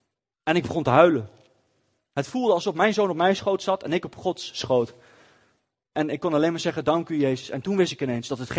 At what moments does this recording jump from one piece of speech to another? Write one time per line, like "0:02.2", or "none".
none

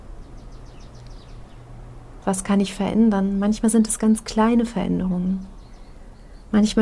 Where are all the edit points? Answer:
0:02.2

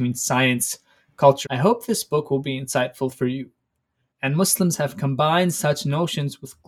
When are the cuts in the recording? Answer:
0:01.4
0:04.1

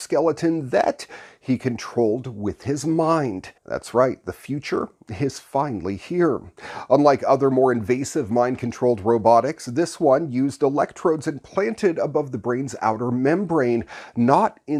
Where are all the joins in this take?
0:03.6

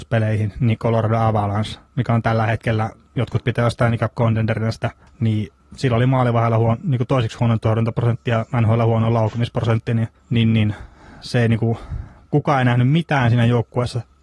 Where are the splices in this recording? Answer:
none

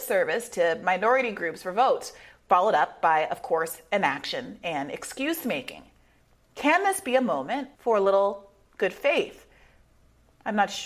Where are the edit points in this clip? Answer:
0:07.7

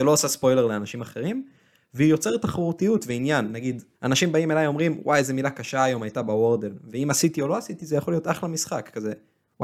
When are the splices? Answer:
0:03.9

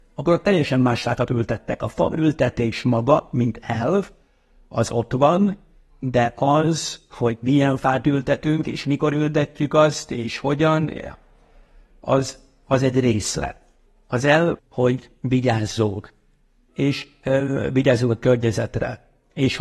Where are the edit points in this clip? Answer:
0:14.6

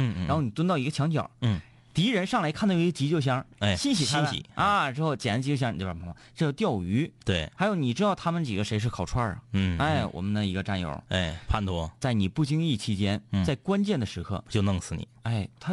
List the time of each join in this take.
none

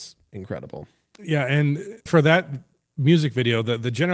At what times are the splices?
0:02.1

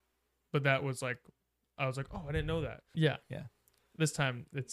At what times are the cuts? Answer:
0:02.9

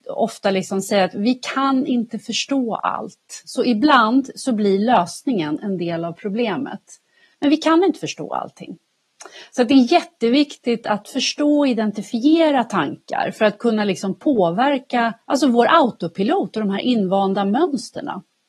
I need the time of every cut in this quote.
0:07.3
0:15.2

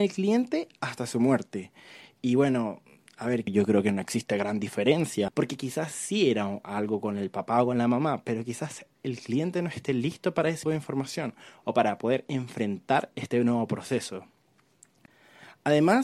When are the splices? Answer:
0:03.5
0:05.3
0:10.6

